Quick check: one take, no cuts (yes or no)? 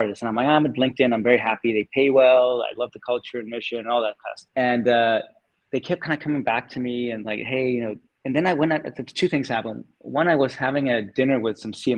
yes